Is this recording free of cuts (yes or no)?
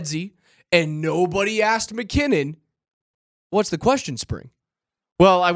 yes